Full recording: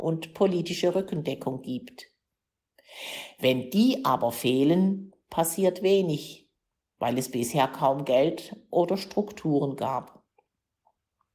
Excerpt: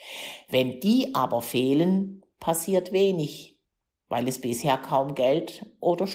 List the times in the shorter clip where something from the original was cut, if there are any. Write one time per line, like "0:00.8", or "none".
none